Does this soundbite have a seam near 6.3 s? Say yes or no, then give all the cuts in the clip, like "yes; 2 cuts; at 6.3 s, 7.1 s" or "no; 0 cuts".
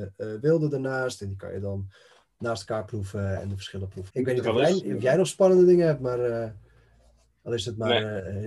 no; 1 cut; at 4.1 s